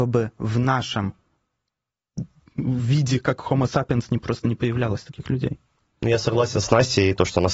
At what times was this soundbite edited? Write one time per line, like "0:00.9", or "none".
none